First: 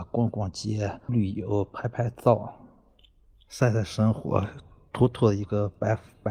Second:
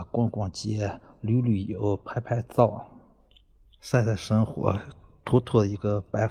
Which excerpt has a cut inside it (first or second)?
first